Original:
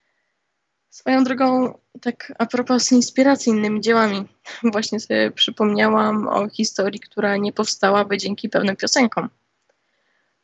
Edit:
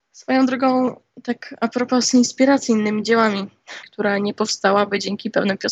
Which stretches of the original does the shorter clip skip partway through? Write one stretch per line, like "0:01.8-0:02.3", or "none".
0:04.6-0:07.0